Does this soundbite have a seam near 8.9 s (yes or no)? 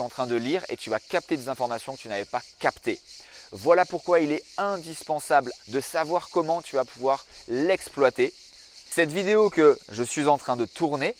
yes